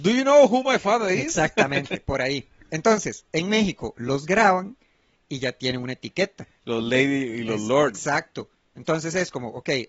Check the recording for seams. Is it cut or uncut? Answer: uncut